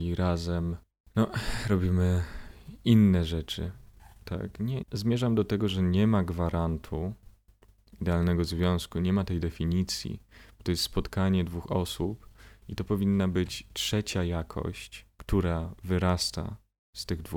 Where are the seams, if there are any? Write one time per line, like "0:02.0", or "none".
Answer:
0:04.8
0:15.1